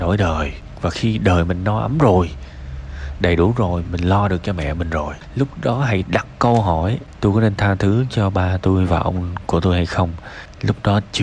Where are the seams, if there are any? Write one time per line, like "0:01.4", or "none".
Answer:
0:03.8